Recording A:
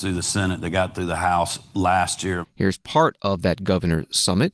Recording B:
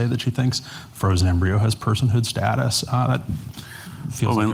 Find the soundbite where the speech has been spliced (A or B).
A